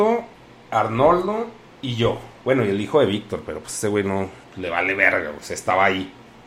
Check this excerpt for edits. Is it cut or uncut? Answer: cut